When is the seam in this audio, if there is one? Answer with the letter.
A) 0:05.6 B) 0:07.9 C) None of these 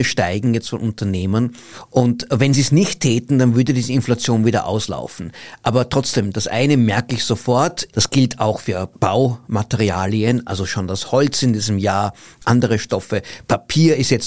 B